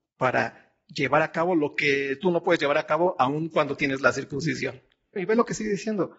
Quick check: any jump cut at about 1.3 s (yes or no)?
no